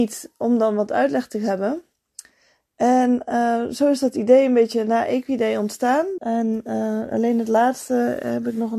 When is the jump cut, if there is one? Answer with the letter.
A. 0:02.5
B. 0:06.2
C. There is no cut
B